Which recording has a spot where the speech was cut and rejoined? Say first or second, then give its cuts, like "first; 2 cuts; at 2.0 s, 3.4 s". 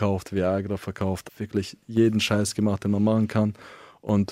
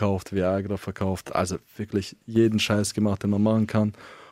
first; 1 cut; at 1.3 s